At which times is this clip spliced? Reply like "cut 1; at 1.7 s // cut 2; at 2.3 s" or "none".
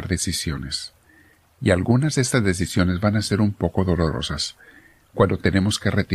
none